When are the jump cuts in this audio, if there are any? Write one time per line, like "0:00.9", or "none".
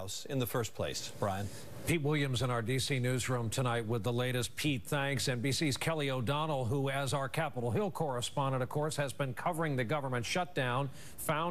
none